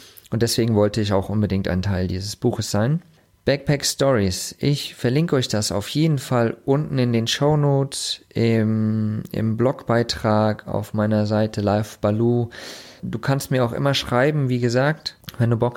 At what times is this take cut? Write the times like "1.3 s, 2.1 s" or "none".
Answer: none